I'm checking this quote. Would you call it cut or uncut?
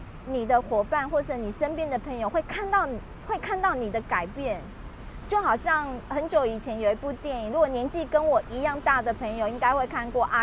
cut